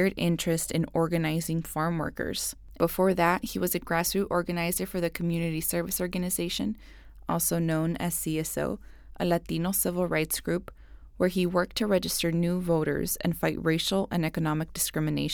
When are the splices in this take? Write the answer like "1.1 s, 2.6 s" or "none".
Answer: 2.8 s